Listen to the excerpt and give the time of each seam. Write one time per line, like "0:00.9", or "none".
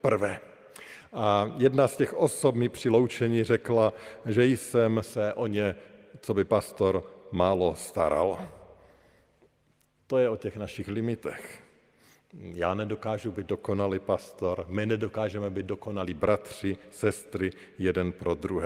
none